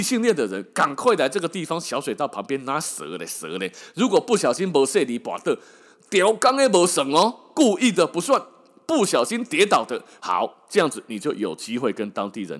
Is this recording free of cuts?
no; 1 cut; at 10.2 s

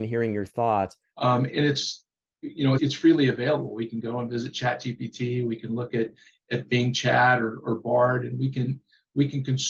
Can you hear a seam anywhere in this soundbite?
yes; 2 cuts; at 1.1 s, 2.8 s

